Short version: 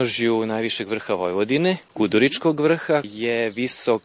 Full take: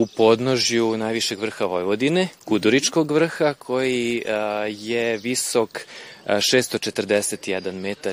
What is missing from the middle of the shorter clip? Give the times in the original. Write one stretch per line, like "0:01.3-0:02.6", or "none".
0:03.6-0:04.7